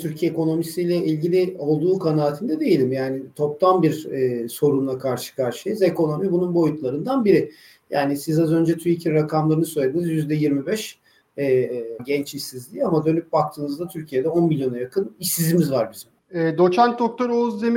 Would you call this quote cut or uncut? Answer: cut